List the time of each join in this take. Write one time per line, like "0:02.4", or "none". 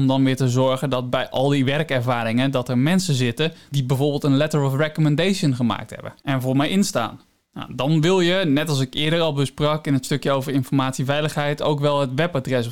none